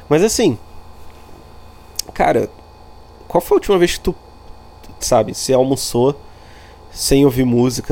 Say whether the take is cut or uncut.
cut